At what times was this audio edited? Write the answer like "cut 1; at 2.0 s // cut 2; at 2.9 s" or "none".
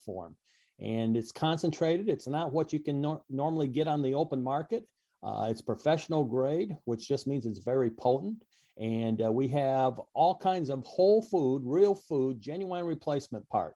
none